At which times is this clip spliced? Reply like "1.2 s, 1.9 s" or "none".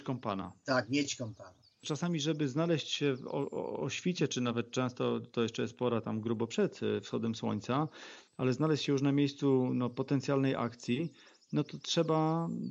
none